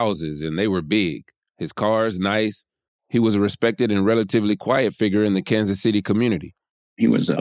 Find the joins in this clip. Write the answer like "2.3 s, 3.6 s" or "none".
2.9 s

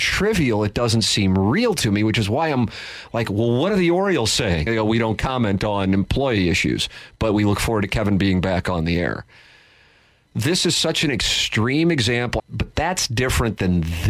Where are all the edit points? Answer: 4.7 s, 12.4 s

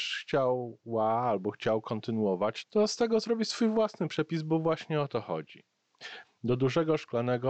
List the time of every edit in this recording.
2.6 s, 6.2 s

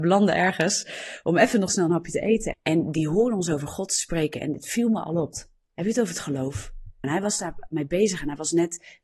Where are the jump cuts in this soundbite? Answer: 2.5 s, 5.3 s, 7.0 s

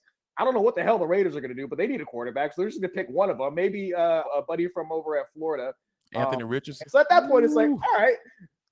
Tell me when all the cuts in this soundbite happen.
4.2 s, 6.8 s

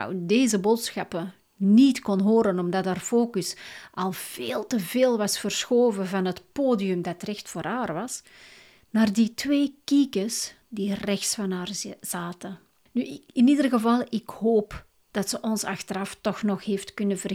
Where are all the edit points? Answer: none

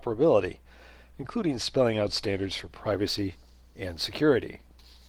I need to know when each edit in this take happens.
none

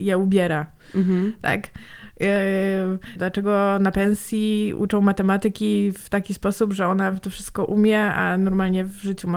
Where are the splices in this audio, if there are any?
3.2 s

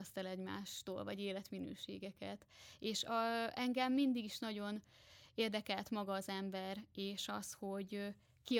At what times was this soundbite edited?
none

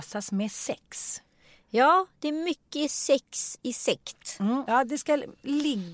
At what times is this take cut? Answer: 4.7 s

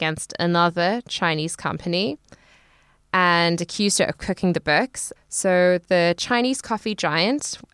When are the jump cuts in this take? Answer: 5.2 s

